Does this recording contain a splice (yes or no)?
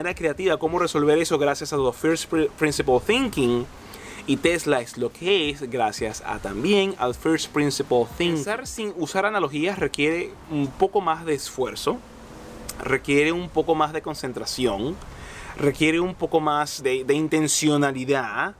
yes